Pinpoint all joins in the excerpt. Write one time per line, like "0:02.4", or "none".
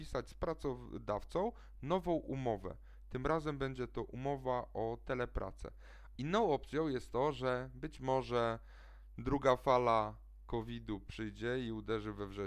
0:06.2

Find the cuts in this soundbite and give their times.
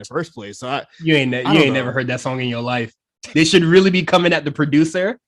0:03.3

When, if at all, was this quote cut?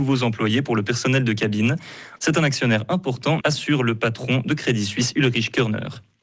0:02.2
0:03.4

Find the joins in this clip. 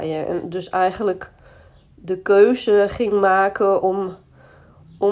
none

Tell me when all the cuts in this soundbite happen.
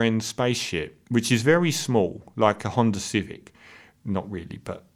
none

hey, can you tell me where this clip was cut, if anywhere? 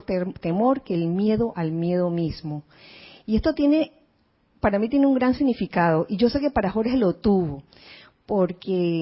none

